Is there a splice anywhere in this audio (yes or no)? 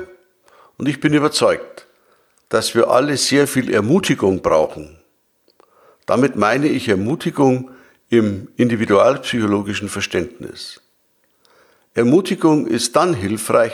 no